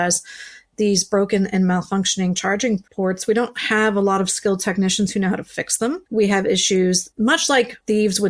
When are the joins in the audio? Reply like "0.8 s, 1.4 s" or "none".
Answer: 2.9 s, 6.1 s